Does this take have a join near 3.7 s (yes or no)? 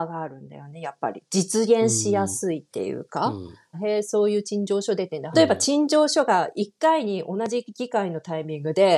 yes